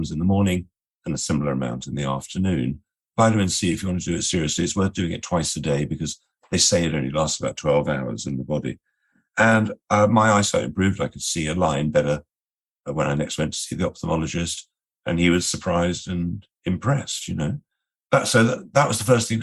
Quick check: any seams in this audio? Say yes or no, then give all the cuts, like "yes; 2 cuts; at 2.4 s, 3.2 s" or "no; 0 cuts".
no; 0 cuts